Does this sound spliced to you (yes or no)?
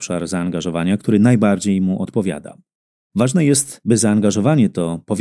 no